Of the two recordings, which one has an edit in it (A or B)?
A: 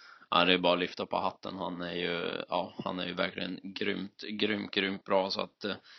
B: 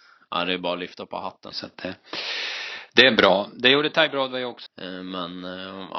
B